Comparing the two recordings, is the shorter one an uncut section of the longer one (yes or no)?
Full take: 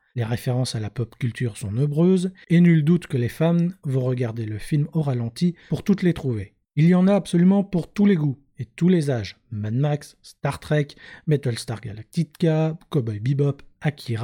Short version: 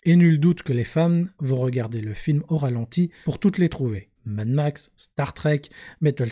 no